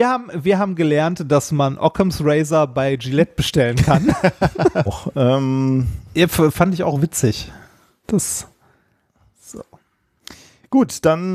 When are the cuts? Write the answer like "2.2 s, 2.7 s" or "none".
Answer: 4.9 s